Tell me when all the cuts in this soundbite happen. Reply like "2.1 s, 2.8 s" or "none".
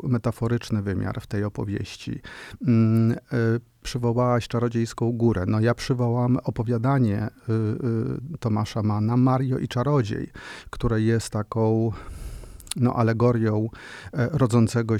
none